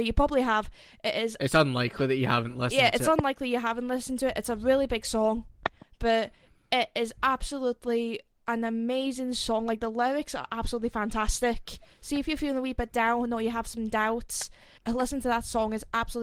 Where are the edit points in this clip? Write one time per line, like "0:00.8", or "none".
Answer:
0:14.8